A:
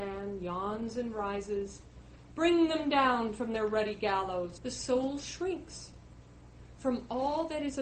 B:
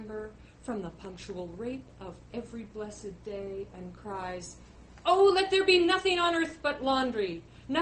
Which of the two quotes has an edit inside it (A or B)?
A